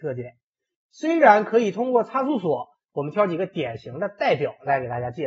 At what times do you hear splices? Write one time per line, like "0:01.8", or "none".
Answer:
0:02.9